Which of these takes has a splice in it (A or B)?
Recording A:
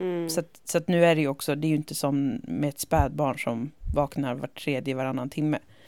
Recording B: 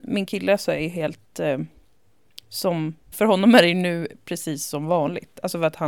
B